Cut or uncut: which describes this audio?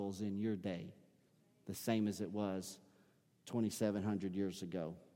uncut